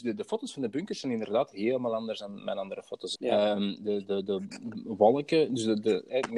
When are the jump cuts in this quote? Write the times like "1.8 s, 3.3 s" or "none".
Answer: 3.1 s